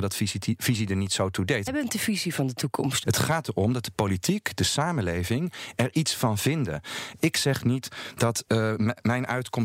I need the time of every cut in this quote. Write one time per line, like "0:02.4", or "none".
0:01.7
0:03.0